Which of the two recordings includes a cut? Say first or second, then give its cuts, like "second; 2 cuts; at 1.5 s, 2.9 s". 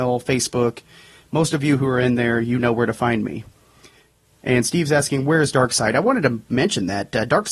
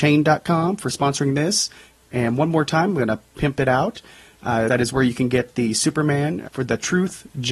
second; 2 cuts; at 4.7 s, 6.4 s